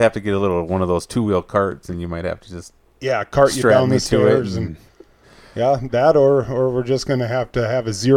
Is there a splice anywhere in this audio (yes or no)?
no